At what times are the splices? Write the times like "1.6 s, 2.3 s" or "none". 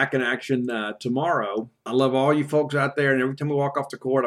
1.9 s